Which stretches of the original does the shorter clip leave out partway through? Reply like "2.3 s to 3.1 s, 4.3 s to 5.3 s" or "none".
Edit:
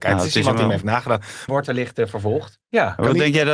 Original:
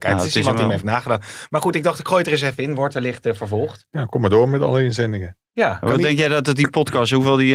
1.5 s to 2.8 s, 3.9 s to 5.4 s